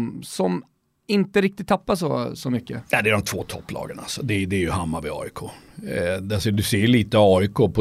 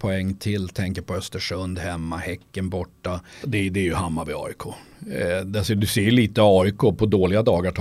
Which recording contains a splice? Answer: second; 1 cut; at 3.4 s

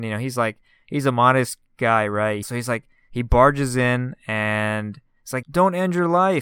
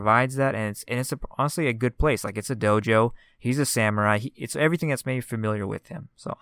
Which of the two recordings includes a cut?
first; 2 cuts; at 2.4 s, 5.4 s

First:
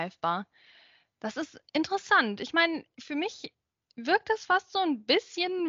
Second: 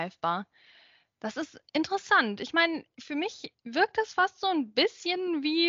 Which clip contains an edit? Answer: second; 1 cut; at 3.6 s

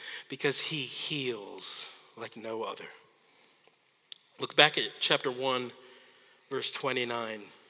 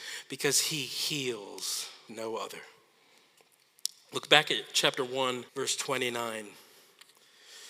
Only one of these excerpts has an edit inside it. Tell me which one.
second; 2 cuts; at 2.1 s, 5.5 s

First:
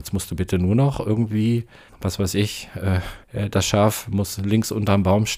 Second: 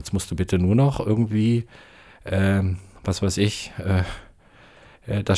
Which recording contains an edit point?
first; 2 cuts; at 1.9 s, 3.2 s

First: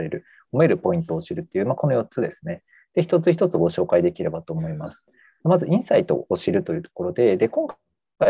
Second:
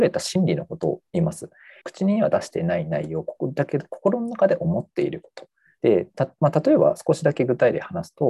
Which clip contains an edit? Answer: second; 2 cuts; at 1.8 s, 5.8 s

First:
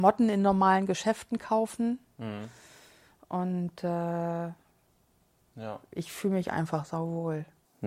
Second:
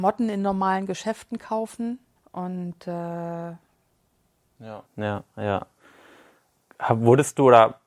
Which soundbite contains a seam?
second; 2 cuts; at 2.2 s, 4.9 s

